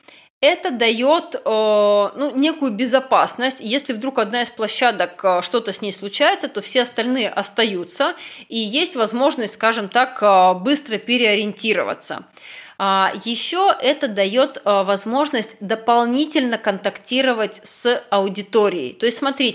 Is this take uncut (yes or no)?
yes